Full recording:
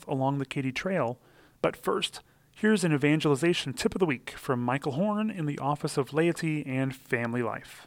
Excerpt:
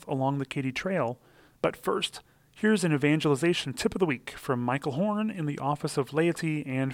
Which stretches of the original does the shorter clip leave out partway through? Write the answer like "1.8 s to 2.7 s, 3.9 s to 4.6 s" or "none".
none